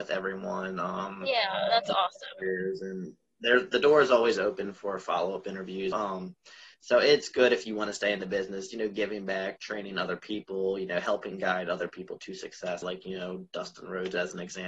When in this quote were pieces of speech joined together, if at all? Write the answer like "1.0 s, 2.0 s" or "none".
5.9 s, 12.8 s

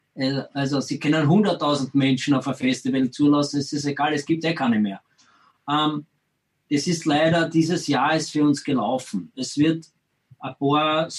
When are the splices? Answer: none

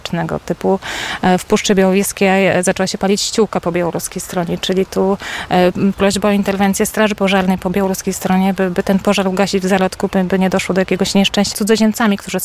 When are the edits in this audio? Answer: 11.5 s

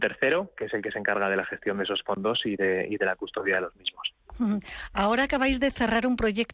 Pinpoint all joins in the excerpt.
none

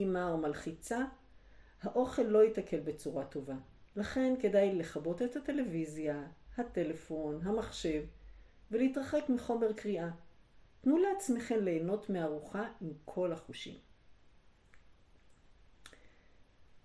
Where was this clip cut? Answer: none

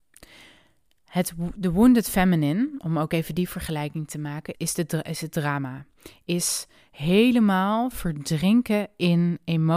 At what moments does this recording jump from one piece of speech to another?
4.5 s

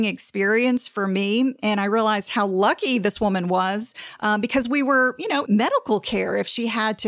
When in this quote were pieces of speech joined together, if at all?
5.5 s

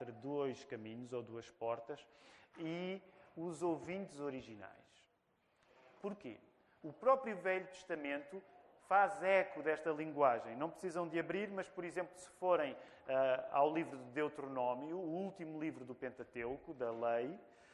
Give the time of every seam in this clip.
6.8 s

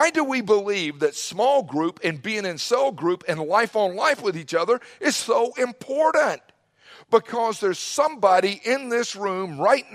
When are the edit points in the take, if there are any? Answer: none

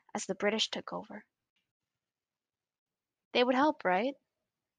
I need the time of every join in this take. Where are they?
none

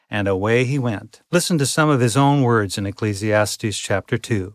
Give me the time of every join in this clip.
1.3 s

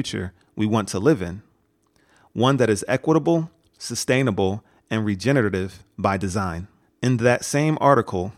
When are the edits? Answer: 6.8 s

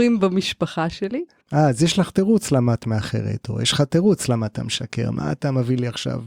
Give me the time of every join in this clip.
1.4 s

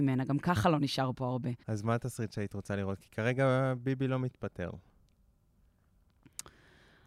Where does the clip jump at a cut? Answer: 1.6 s

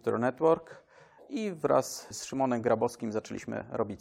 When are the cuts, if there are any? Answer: 2.1 s

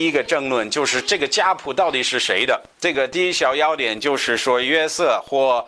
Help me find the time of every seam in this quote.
2.7 s

